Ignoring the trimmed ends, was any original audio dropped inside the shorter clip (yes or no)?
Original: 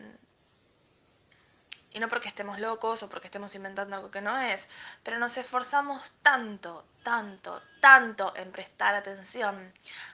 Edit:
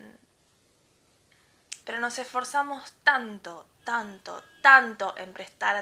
yes